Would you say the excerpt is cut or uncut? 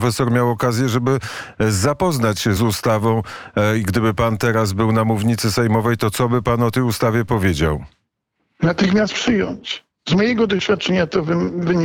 cut